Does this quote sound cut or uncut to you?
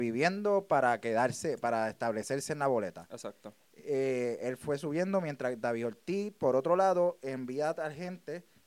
uncut